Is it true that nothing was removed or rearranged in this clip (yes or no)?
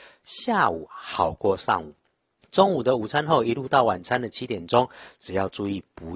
yes